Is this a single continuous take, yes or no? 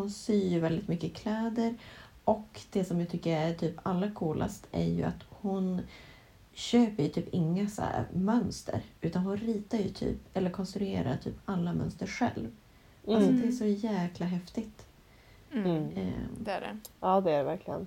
yes